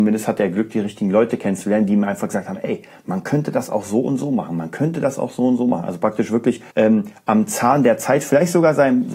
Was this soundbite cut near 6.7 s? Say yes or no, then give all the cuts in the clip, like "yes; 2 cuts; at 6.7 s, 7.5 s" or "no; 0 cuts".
yes; 1 cut; at 6.7 s